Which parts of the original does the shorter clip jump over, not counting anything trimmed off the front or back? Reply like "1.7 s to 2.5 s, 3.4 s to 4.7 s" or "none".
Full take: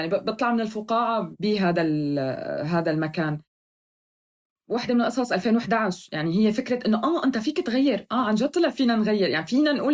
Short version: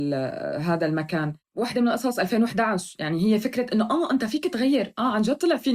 3.5 s to 4.6 s